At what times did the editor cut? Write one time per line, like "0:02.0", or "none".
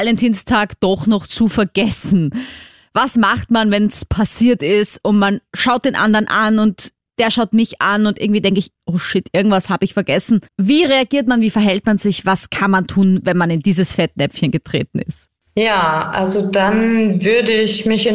0:10.5